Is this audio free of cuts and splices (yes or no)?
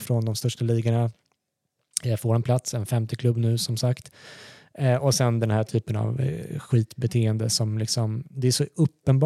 yes